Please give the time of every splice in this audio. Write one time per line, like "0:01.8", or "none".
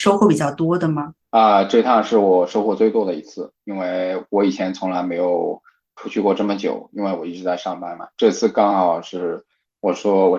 none